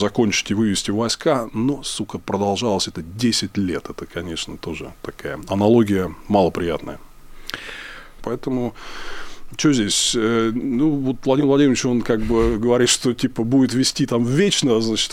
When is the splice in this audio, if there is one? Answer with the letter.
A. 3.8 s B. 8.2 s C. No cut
B